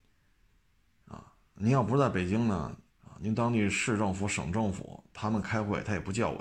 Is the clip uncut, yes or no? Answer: no